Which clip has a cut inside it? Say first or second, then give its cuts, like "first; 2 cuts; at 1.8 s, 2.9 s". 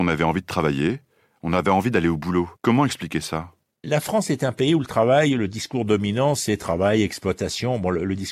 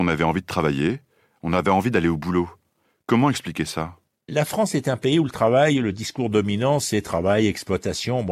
first; 1 cut; at 2.6 s